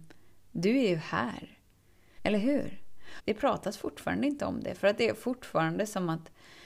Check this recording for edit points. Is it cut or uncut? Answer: cut